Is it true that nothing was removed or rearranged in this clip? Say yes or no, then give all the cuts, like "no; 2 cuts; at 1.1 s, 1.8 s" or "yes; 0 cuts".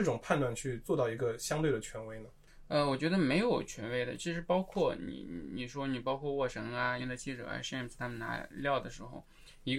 no; 1 cut; at 7.0 s